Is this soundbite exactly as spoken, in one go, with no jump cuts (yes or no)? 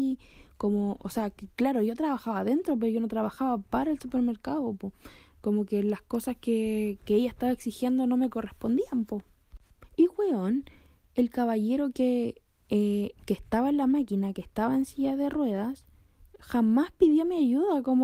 yes